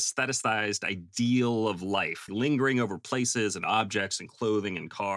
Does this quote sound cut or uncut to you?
cut